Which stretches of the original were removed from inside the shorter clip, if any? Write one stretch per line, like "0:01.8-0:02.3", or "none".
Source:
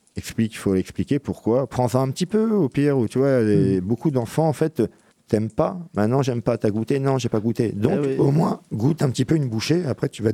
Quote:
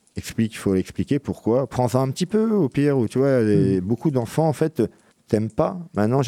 none